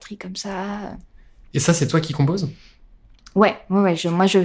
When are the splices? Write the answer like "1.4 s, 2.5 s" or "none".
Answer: none

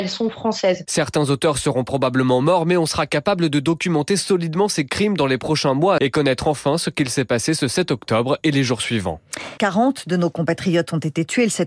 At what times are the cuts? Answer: 6.0 s, 9.6 s

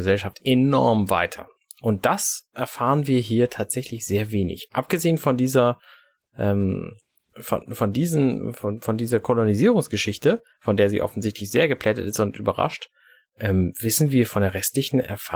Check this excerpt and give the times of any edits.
none

